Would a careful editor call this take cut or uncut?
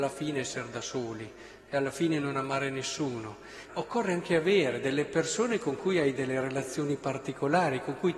cut